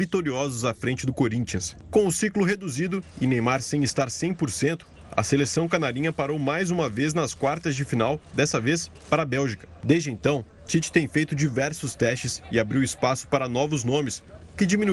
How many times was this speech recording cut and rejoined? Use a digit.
0